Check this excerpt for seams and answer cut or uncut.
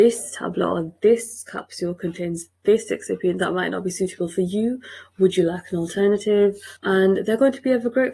cut